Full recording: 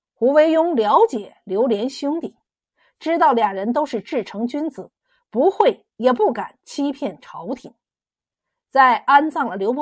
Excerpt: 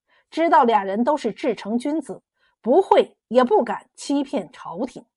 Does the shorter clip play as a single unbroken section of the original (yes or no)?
yes